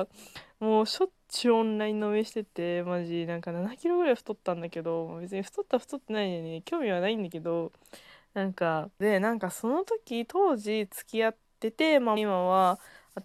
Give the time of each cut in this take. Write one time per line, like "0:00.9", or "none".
0:08.9
0:12.2